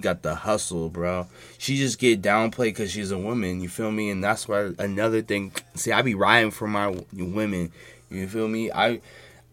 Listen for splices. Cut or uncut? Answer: uncut